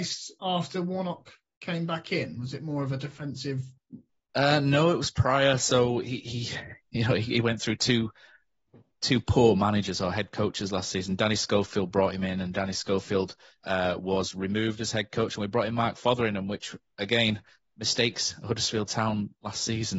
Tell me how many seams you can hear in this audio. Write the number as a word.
one